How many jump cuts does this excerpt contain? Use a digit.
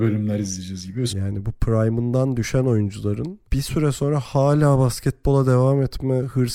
2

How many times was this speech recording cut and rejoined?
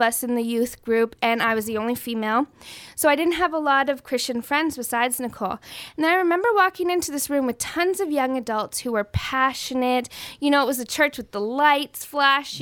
0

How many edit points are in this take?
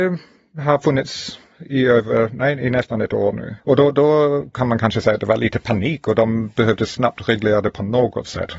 1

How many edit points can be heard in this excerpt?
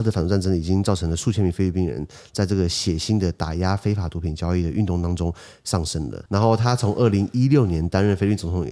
1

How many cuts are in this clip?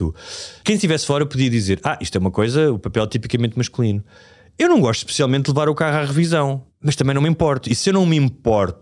0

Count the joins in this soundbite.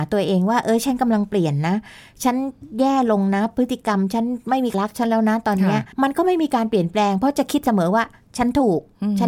2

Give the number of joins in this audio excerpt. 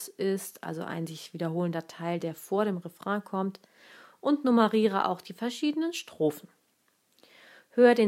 0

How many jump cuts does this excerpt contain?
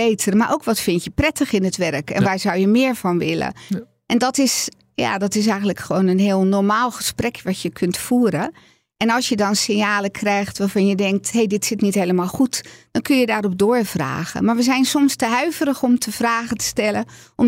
0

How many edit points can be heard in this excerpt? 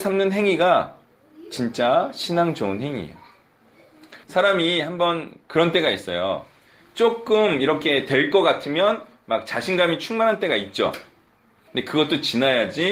2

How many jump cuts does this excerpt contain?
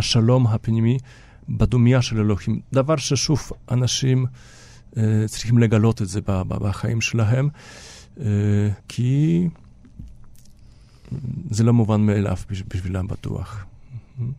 1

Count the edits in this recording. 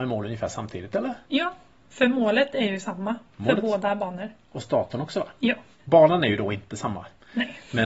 1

